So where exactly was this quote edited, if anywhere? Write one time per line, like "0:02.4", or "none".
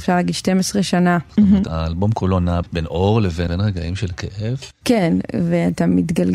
0:01.3
0:04.8